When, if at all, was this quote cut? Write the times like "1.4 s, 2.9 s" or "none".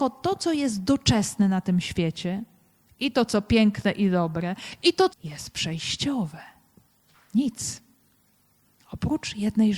5.1 s, 7.1 s